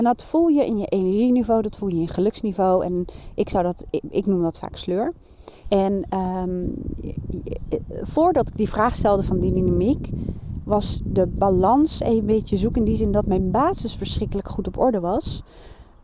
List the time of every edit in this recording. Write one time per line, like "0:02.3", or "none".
0:05.6